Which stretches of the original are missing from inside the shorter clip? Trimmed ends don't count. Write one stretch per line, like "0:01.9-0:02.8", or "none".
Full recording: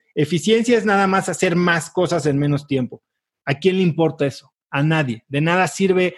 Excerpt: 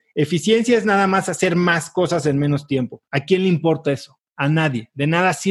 0:03.1-0:03.4